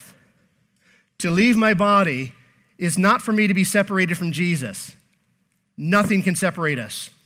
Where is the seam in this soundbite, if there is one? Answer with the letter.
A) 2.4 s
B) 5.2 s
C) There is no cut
C